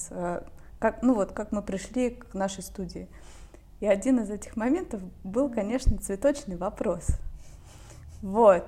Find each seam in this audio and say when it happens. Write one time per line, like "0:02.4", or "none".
none